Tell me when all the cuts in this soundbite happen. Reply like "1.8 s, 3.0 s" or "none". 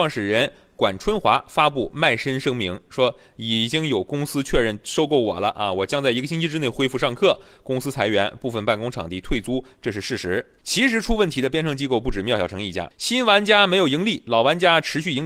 10.6 s, 12.9 s